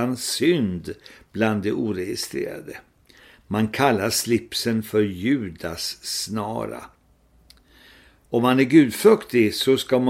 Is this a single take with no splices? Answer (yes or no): yes